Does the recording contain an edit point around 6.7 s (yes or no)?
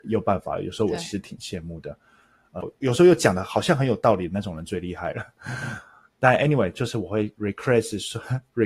no